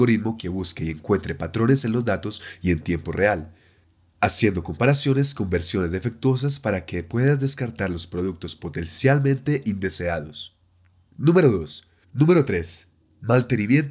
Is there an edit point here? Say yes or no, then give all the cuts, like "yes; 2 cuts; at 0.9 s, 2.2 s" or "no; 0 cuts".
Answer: yes; 1 cut; at 12.0 s